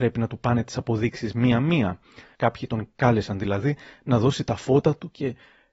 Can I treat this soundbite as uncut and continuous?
no; 1 cut; at 2.3 s

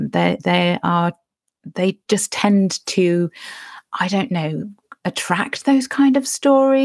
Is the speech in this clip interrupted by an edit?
no; 0 cuts

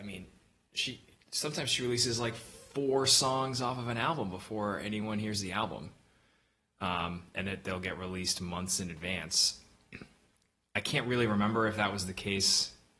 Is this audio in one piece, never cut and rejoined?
yes; 0 cuts

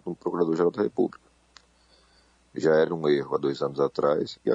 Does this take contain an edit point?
no; 0 cuts

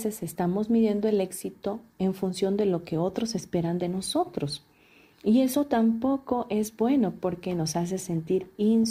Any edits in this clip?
no; 0 cuts

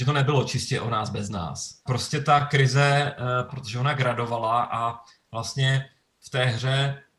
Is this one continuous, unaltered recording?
no; 2 cuts; at 1.9 s, 3.5 s

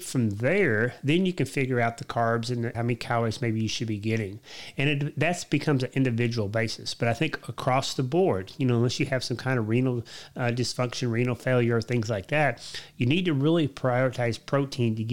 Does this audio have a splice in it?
yes; 1 cut; at 2.7 s

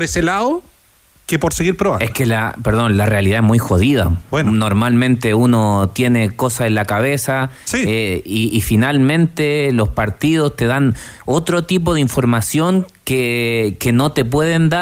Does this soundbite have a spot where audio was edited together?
no; 0 cuts

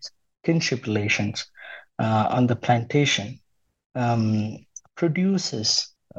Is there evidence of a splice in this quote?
no; 0 cuts

